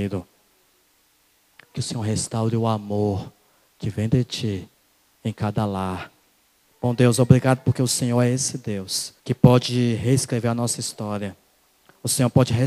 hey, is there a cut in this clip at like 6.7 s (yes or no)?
yes